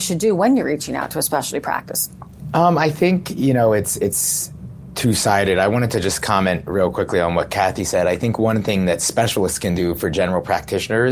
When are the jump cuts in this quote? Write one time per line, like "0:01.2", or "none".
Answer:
none